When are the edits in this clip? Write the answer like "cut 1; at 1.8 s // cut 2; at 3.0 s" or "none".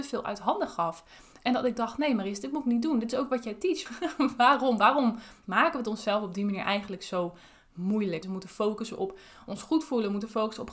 cut 1; at 3.9 s // cut 2; at 8.2 s